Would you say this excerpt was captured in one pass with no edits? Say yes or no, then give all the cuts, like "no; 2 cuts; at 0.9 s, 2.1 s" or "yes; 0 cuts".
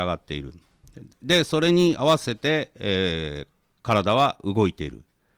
yes; 0 cuts